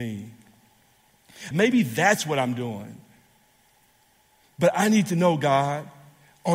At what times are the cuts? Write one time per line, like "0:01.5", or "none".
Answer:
0:01.5